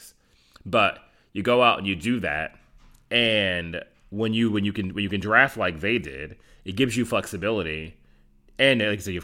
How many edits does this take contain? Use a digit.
0